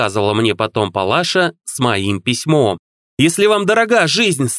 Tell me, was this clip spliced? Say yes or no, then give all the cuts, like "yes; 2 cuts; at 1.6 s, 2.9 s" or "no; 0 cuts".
yes; 1 cut; at 3.0 s